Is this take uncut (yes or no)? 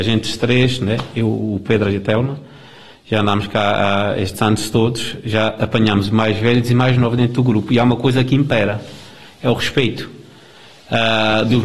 yes